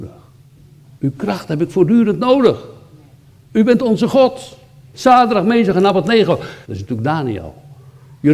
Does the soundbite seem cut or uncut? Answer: cut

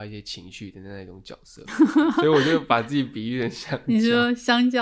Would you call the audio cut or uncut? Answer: uncut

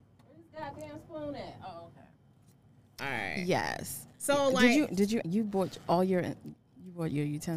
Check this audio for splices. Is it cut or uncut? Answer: cut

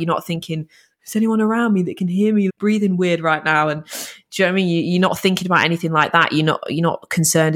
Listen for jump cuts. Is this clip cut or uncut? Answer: cut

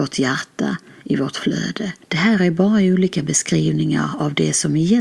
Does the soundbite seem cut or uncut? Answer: cut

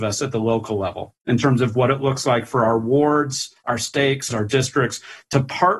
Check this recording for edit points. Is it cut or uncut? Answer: cut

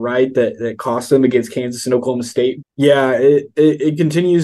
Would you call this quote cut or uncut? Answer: cut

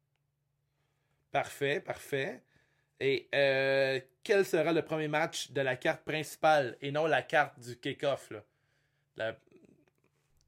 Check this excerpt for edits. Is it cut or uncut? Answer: uncut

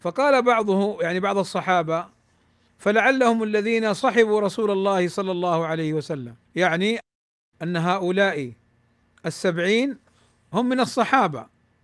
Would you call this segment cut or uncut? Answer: cut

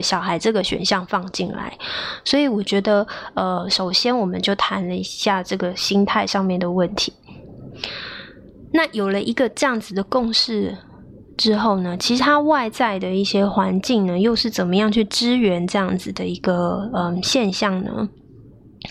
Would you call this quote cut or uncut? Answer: uncut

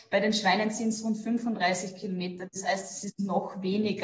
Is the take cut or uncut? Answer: uncut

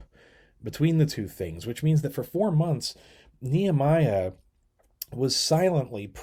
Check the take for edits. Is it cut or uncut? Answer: uncut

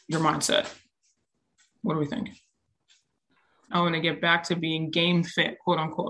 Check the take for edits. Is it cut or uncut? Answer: cut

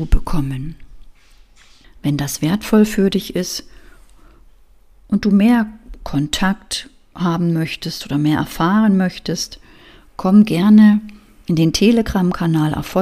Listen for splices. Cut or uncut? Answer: cut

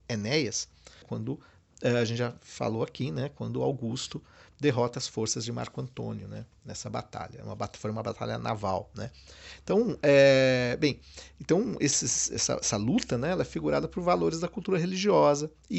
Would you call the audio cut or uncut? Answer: cut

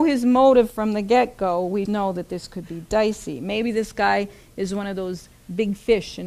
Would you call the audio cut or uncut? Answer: cut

